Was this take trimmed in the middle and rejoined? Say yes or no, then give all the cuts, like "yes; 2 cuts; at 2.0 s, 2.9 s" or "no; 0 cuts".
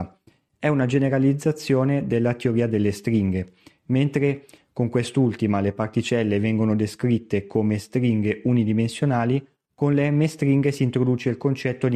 no; 0 cuts